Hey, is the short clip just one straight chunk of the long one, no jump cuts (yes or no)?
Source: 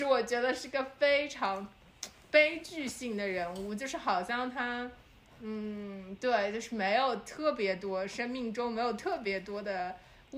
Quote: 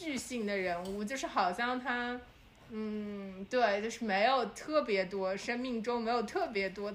yes